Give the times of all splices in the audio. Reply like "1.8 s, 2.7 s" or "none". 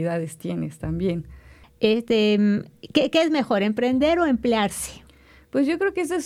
1.6 s